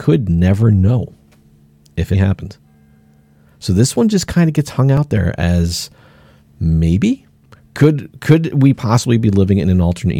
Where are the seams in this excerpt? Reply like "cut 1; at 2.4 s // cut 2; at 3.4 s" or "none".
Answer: cut 1; at 2.1 s